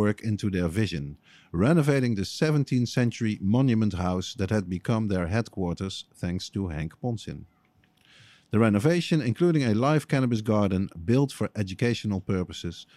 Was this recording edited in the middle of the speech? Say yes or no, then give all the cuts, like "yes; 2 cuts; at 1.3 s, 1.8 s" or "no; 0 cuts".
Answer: no; 0 cuts